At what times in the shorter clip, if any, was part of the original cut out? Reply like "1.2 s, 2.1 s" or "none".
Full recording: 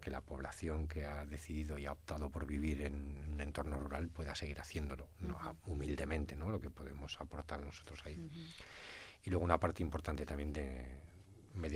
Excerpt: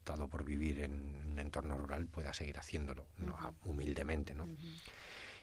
4.4 s